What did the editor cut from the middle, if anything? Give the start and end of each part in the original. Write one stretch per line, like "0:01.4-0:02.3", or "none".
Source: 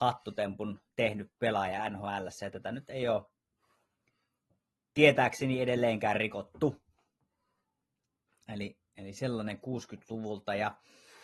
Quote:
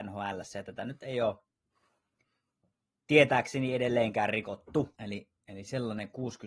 0:06.8-0:08.4